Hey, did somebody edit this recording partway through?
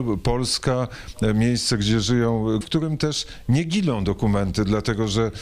yes; 1 cut; at 2.6 s

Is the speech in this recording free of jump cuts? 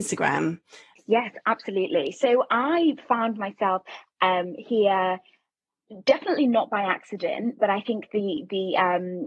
no; 1 cut; at 1.0 s

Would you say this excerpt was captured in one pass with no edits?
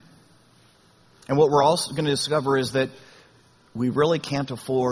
yes; 0 cuts

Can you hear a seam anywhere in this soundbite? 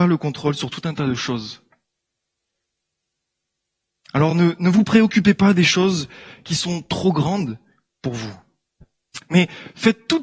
no; 0 cuts

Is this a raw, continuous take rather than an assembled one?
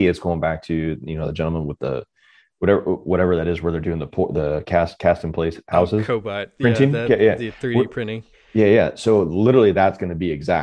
yes; 0 cuts

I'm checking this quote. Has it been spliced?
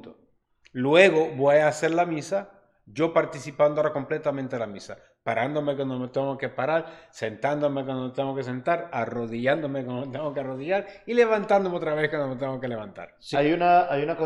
yes; 1 cut; at 13.3 s

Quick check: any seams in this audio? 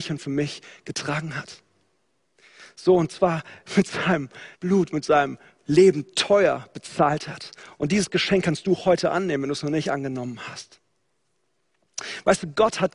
yes; 1 cut; at 4.5 s

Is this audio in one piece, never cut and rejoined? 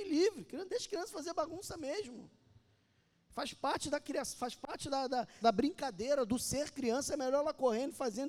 no; 1 cut; at 5.4 s

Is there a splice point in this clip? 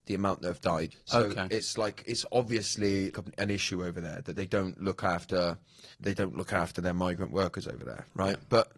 yes; 3 cuts; at 0.9 s, 3.1 s, 5.9 s

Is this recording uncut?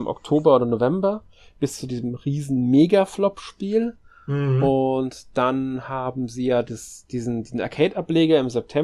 yes; 0 cuts

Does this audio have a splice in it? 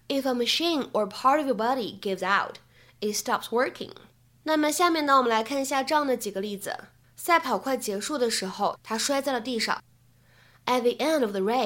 yes; 3 cuts; at 4.4 s, 7.0 s, 8.8 s

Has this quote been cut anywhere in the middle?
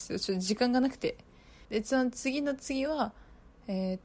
yes; 1 cut; at 1.6 s

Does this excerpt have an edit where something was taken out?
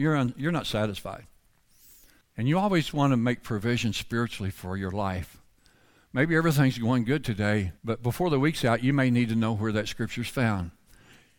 yes; 2 cuts; at 2.2 s, 7.8 s

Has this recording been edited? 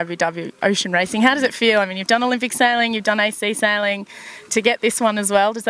no; 0 cuts

